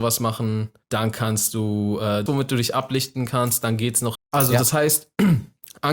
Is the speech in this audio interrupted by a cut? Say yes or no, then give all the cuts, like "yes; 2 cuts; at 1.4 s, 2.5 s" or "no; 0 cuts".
yes; 2 cuts; at 2.3 s, 4.2 s